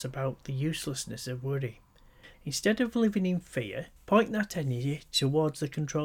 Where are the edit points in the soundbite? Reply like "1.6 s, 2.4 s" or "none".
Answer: 2.3 s, 4.0 s